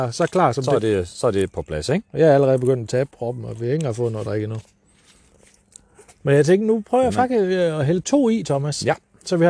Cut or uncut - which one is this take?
uncut